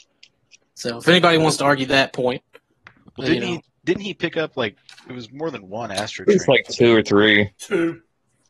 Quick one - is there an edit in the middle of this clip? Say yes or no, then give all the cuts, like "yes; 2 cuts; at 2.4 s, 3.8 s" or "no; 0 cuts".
no; 0 cuts